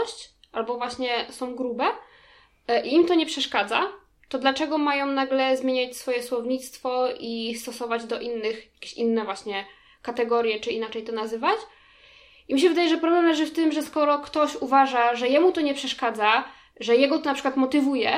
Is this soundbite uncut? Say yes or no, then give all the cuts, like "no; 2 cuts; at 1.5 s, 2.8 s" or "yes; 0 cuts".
yes; 0 cuts